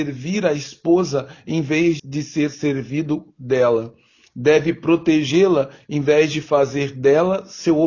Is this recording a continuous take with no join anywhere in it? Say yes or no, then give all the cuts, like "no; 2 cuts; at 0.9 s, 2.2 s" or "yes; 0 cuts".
no; 1 cut; at 2.0 s